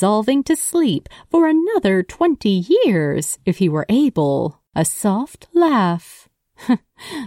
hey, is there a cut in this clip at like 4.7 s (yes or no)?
yes